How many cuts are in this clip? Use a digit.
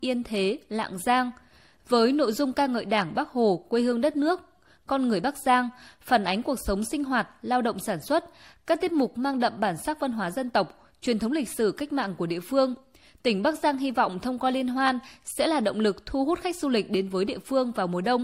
0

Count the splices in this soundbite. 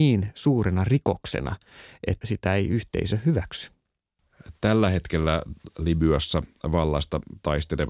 1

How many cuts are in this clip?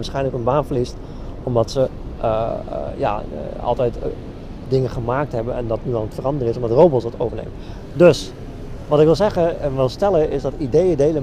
0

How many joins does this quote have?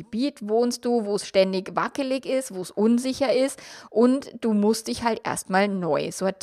0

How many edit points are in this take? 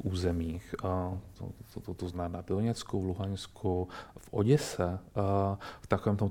1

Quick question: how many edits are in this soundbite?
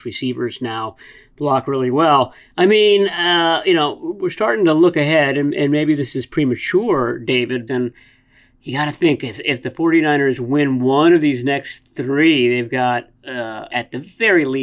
2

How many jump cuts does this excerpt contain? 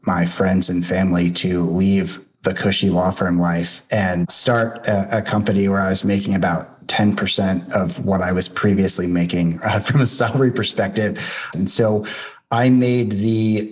1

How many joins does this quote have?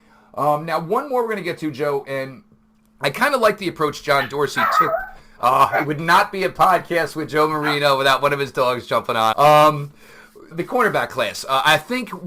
2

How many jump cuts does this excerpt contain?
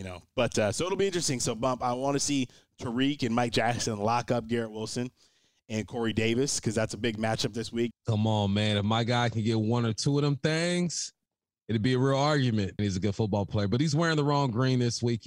2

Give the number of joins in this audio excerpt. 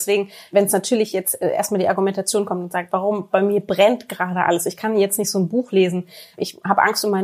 0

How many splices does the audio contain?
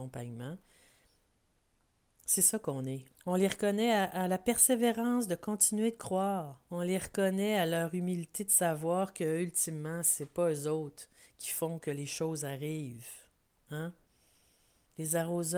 2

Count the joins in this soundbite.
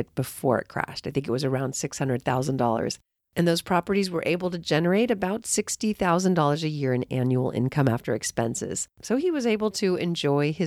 2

